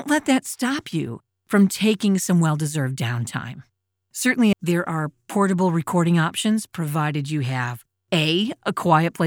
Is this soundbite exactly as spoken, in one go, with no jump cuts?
no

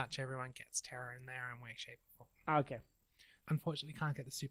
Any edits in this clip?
yes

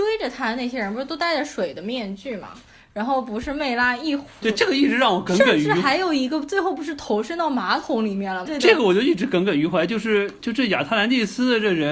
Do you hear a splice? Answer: yes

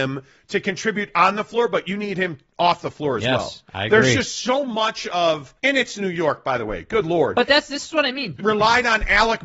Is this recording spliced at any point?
yes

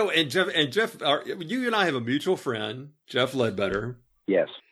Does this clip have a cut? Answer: no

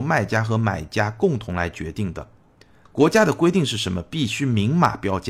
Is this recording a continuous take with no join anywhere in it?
no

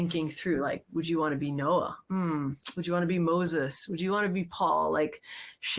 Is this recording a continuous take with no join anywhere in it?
yes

